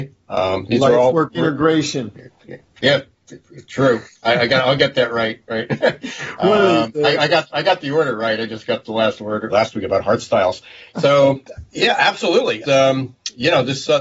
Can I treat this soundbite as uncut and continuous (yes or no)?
no